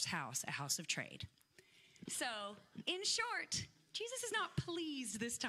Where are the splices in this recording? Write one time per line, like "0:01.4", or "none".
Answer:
0:02.1

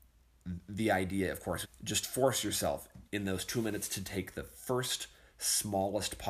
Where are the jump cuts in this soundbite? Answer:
0:01.6
0:03.1

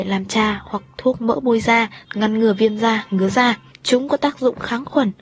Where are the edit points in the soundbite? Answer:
0:02.0
0:03.7

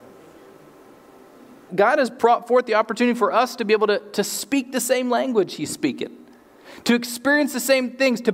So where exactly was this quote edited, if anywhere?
0:01.7

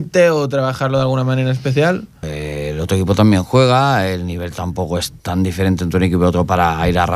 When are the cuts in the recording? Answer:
0:02.2
0:05.2

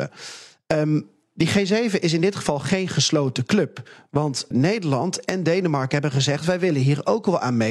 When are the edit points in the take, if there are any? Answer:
0:04.5

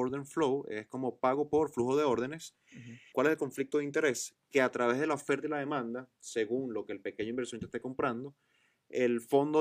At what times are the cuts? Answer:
0:03.1

